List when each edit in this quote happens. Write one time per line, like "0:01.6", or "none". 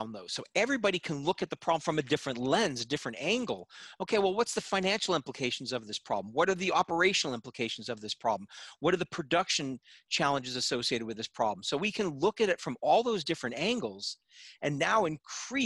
none